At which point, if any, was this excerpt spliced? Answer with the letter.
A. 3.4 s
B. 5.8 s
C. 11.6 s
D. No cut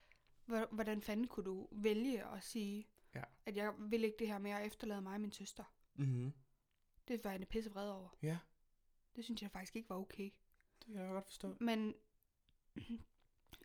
D